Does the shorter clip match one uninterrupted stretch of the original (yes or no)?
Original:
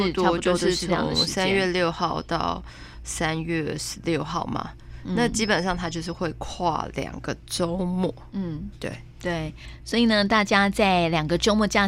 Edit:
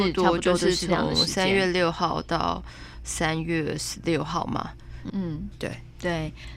no